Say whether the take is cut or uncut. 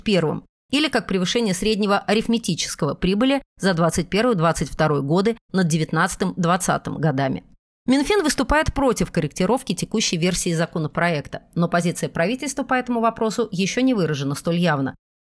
uncut